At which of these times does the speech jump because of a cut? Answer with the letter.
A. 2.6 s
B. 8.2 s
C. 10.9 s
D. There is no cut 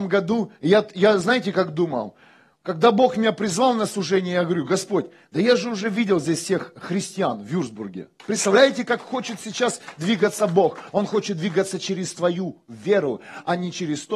B